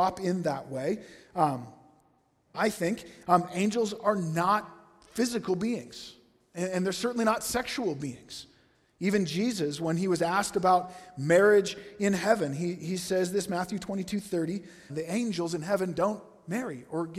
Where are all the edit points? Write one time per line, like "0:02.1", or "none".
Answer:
0:02.5
0:14.9